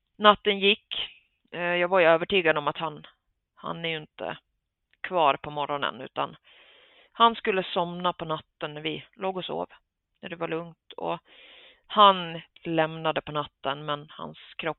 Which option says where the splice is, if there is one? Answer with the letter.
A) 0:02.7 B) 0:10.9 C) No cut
C